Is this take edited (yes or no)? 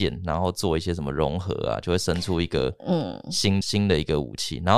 no